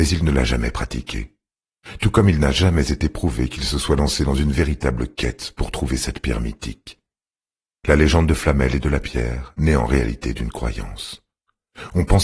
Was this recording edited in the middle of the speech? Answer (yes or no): no